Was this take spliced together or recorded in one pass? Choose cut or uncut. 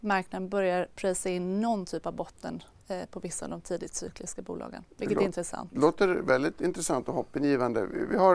uncut